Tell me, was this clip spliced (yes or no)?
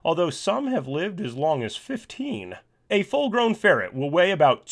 yes